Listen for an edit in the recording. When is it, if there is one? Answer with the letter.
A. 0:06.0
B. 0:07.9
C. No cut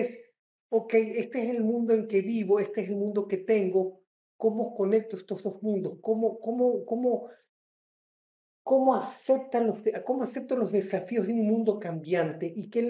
C